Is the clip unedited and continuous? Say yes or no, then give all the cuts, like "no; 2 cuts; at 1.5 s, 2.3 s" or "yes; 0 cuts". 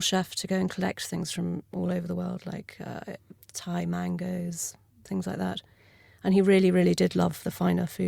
no; 1 cut; at 3.4 s